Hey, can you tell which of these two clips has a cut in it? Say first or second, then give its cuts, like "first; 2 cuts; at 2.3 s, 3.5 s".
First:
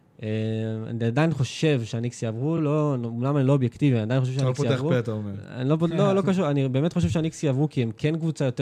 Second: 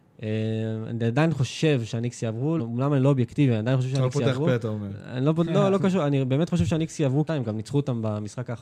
second; 2 cuts; at 2.6 s, 7.3 s